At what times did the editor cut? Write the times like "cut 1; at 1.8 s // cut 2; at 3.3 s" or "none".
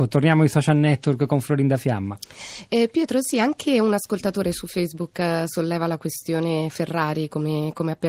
none